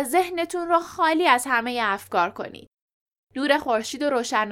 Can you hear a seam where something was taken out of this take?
no; 0 cuts

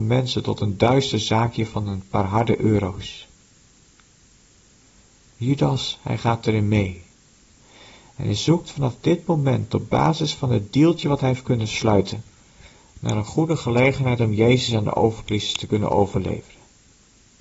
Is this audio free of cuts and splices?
yes; 0 cuts

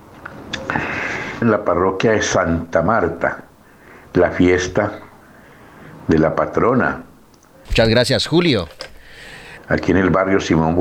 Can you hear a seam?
yes; 3 cuts; at 1.4 s, 7.7 s, 9.6 s

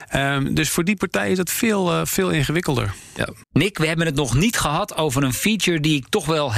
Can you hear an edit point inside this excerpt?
yes; 1 cut; at 3.4 s

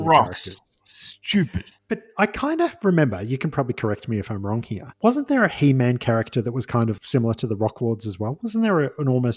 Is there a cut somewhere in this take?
yes; 1 cut; at 7.0 s

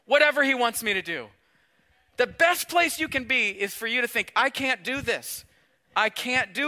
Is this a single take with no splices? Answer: yes; 0 cuts

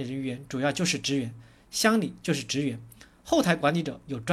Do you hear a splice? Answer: no; 0 cuts

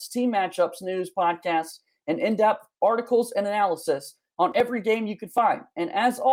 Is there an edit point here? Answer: no; 0 cuts

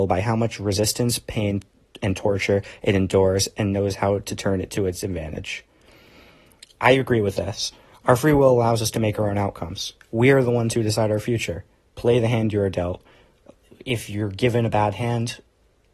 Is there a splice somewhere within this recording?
no; 0 cuts

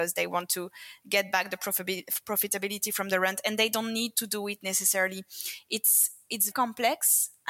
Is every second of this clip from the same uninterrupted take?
no; 1 cut; at 6.5 s

